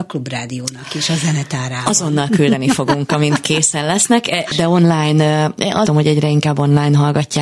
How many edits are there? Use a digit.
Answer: 2